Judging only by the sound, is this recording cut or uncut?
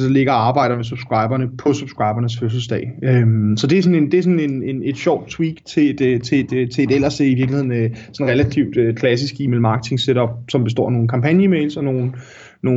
uncut